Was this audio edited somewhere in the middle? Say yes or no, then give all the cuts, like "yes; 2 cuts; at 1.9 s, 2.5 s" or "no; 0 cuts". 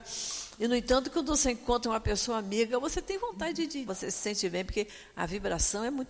yes; 1 cut; at 3.9 s